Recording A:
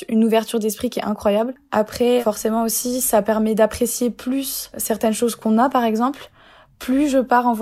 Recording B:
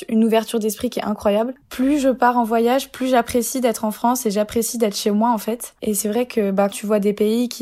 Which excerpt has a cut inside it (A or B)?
B